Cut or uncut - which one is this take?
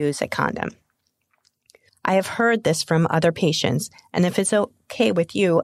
cut